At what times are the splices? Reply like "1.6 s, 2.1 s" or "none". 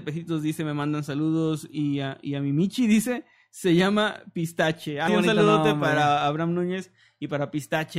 5.1 s